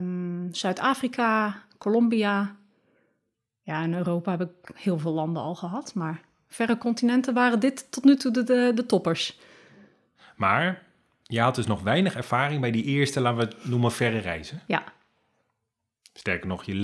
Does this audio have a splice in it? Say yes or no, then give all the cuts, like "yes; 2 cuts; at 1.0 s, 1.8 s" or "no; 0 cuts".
no; 0 cuts